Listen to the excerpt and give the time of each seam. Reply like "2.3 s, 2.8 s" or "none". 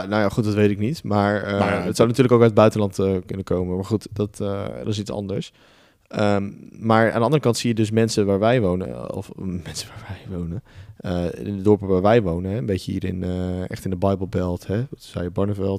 none